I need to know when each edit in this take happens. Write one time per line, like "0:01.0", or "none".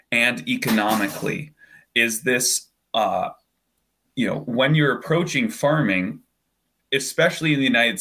none